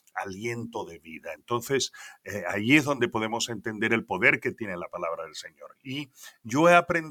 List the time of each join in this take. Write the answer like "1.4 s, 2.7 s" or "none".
none